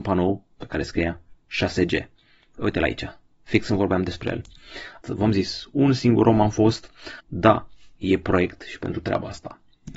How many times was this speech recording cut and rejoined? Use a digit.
2